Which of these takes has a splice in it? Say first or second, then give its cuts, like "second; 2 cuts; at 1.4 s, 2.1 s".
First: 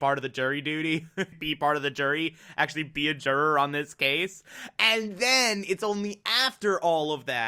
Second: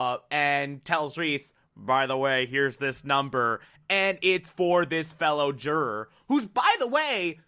first; 1 cut; at 1.3 s